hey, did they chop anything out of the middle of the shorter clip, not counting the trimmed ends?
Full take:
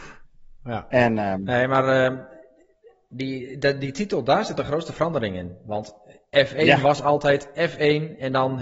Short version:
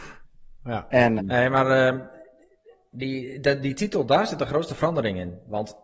yes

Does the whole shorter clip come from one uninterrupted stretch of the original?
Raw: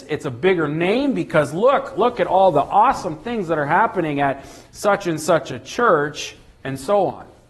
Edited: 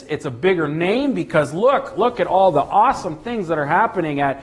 yes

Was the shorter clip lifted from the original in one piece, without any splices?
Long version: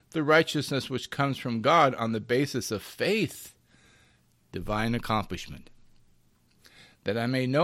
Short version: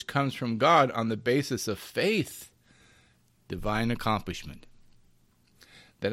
yes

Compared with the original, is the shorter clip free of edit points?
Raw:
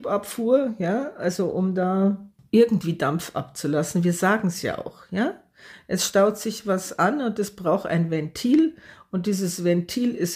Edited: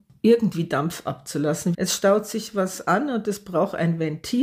no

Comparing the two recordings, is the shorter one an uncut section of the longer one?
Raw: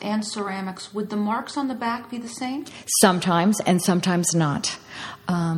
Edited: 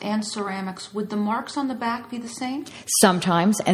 yes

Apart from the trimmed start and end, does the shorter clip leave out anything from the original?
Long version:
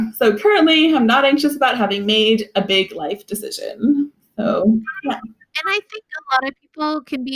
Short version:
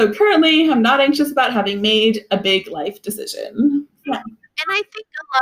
yes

